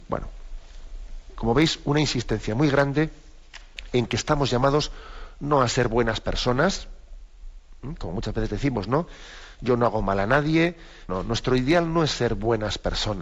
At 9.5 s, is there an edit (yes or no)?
no